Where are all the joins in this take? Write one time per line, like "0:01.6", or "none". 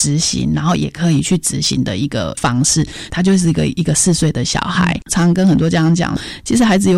0:03.1
0:05.0